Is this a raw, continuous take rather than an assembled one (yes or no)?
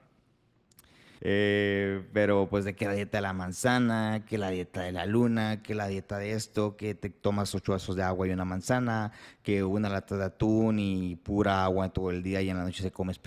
no